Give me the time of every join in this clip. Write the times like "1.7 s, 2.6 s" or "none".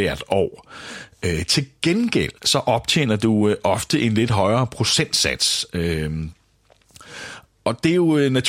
2.4 s